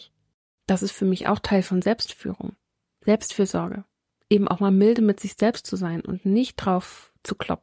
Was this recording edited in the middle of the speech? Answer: no; 0 cuts

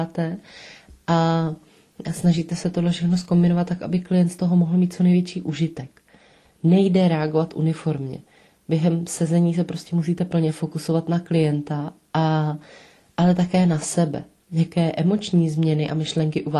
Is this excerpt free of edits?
yes; 0 cuts

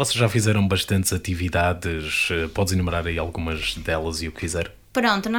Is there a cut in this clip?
no; 0 cuts

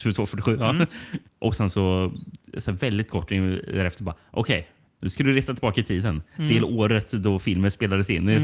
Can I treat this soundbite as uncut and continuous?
yes; 0 cuts

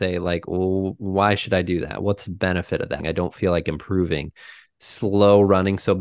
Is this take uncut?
no; 2 cuts; at 3.0 s, 4.7 s

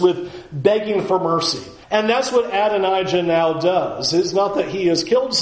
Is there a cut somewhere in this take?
yes; 1 cut; at 1.8 s

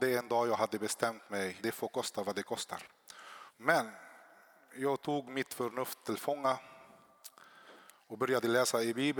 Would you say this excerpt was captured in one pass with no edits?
no; 2 cuts; at 1.6 s, 3.5 s

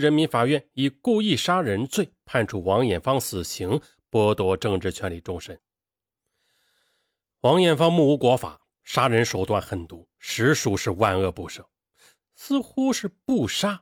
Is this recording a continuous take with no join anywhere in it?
yes; 0 cuts

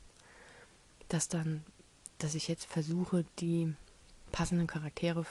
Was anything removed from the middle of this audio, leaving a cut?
no; 0 cuts

